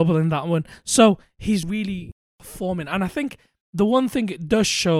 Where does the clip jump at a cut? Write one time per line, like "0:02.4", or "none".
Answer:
0:01.6